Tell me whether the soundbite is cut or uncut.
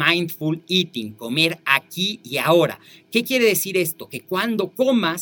uncut